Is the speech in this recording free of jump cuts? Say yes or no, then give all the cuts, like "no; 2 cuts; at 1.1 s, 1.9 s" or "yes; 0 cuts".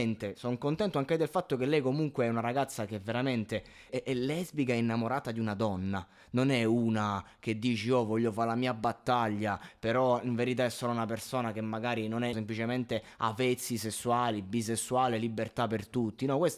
no; 2 cuts; at 3.9 s, 12.3 s